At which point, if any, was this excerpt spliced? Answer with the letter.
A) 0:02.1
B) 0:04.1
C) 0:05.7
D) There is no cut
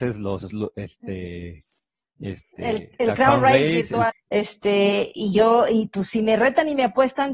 B